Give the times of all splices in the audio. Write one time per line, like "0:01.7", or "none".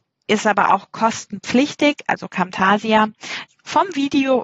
0:03.5